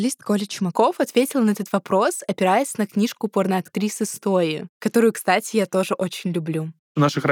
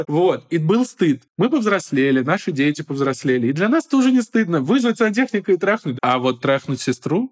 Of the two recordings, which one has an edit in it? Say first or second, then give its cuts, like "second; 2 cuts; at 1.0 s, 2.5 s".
second; 1 cut; at 5.9 s